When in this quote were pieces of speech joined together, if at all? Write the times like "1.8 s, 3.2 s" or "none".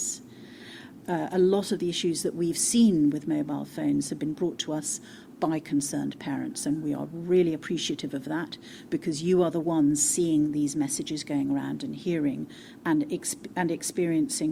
1.0 s